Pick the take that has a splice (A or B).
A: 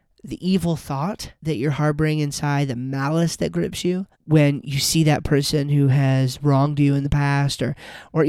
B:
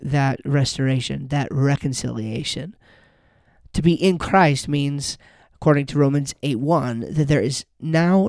A